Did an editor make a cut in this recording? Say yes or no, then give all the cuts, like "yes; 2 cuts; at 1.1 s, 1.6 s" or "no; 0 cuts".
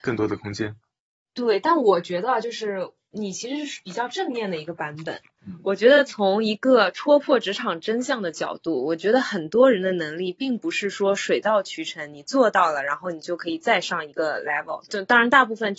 no; 0 cuts